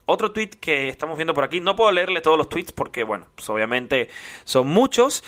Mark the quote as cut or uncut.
uncut